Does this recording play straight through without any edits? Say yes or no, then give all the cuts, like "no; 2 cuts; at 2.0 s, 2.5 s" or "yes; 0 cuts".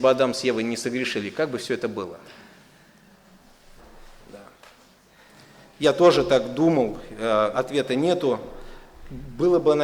no; 1 cut; at 7.5 s